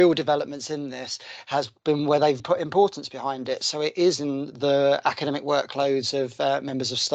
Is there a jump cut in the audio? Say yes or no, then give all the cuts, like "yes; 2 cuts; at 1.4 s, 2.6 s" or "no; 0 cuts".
yes; 1 cut; at 2.4 s